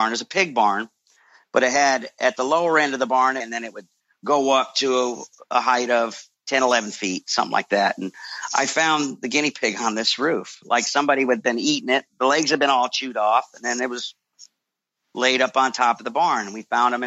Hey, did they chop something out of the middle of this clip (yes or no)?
yes